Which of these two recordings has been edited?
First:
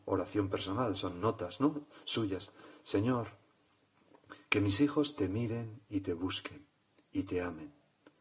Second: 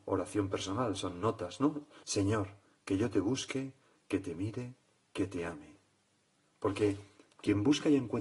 second; 1 cut; at 2.0 s

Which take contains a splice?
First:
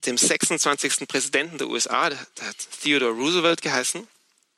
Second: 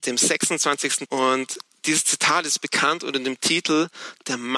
second; 1 cut; at 1.1 s

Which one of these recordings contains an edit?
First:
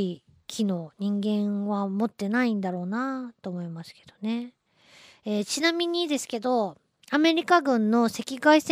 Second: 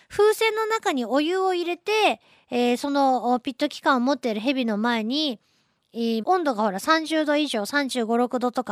second; 1 cut; at 6.2 s

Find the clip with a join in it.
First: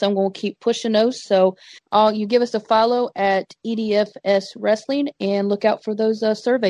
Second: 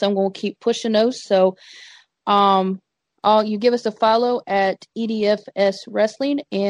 first; 1 cut; at 1.8 s

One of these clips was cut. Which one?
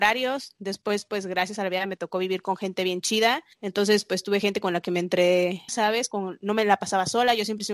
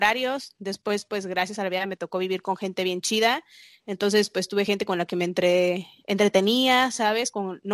first; 2 cuts; at 3.5 s, 5.7 s

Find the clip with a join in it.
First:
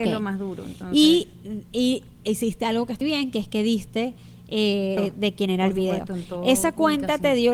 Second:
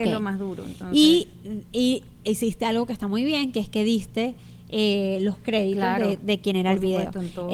first; 2 cuts; at 3.0 s, 5.0 s

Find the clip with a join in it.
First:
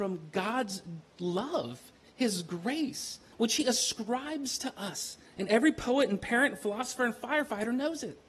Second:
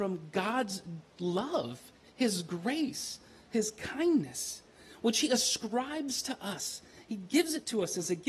first; 2 cuts; at 3.3 s, 5.3 s

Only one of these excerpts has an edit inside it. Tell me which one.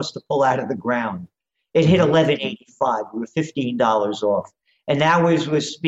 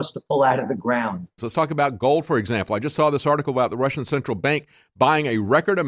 second; 1 cut; at 1.4 s

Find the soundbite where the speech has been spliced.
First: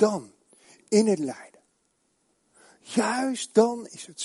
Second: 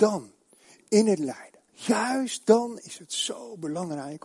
second; 1 cut; at 1.7 s

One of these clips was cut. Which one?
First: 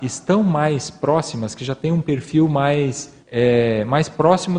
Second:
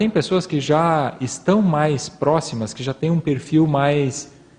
first; 1 cut; at 3.2 s

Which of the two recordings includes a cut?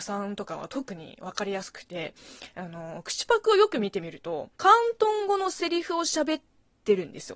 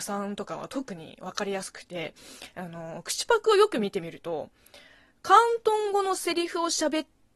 first; 1 cut; at 4.5 s

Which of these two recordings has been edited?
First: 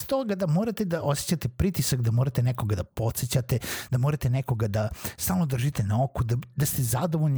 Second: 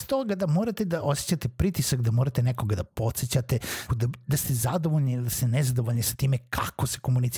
second; 1 cut; at 3.9 s

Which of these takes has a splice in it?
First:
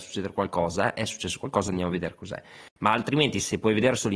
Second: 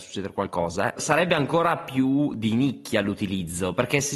second; 1 cut; at 1.0 s

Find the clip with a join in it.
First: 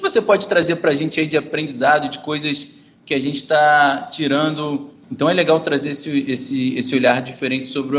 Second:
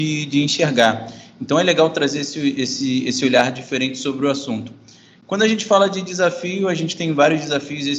first; 1 cut; at 5.0 s

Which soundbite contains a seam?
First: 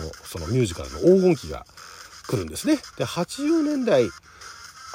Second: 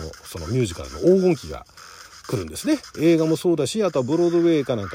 first; 1 cut; at 2.9 s

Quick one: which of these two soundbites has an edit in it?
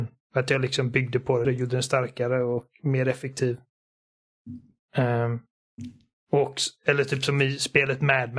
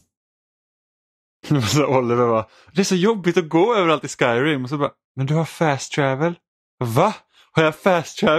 first; 1 cut; at 1.4 s

